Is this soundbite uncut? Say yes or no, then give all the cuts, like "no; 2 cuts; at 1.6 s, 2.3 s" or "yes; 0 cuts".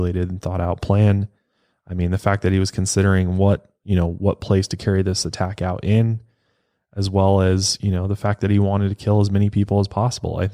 yes; 0 cuts